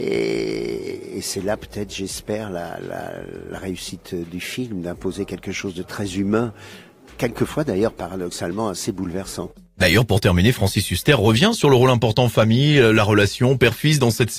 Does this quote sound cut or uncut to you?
uncut